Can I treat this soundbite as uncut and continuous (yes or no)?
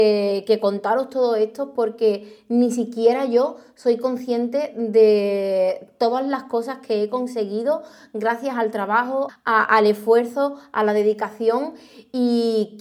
no